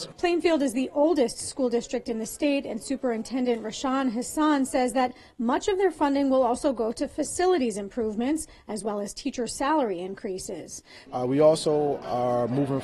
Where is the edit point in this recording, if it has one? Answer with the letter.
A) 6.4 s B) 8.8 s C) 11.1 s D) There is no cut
C